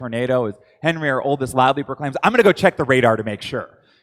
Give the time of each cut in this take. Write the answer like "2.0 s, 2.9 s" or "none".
none